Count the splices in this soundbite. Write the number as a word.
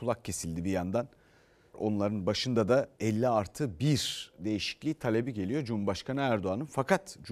two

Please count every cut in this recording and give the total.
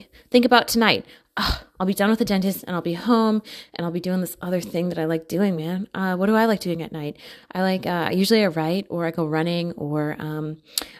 one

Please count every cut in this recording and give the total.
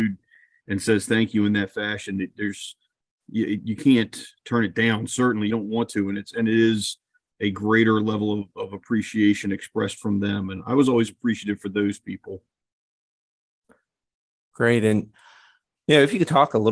zero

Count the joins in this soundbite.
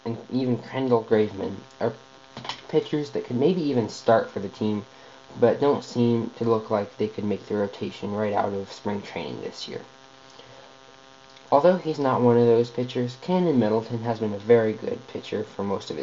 one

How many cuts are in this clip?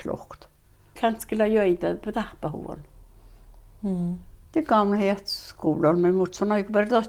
two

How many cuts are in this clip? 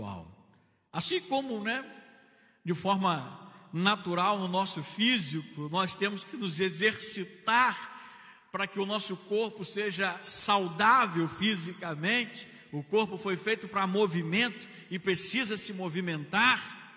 zero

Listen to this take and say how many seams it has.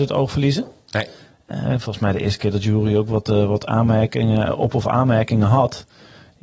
zero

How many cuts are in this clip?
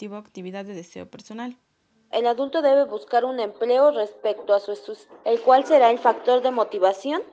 two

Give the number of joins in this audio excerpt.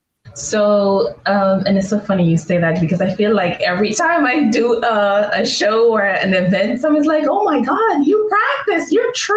zero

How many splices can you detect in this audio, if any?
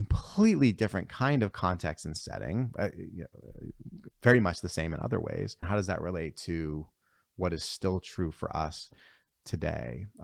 two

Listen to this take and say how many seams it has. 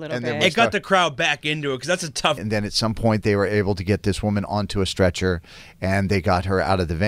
one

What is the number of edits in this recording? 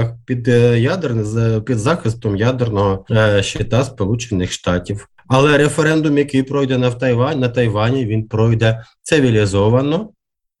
zero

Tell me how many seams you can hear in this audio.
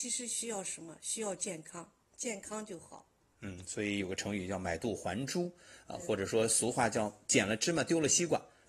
zero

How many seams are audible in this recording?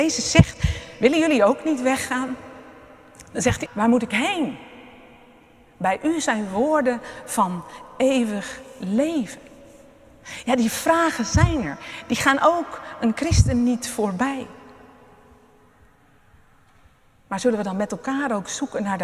one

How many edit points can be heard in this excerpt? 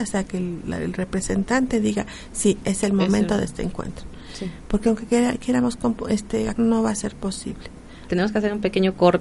two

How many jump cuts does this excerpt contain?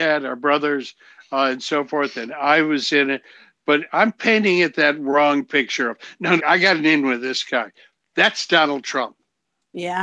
one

